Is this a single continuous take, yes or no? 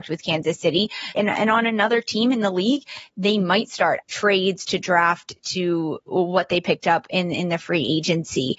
no